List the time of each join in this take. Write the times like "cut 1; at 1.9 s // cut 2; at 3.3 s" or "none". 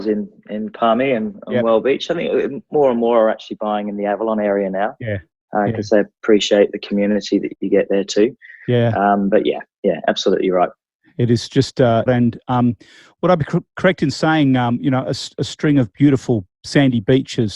cut 1; at 12.1 s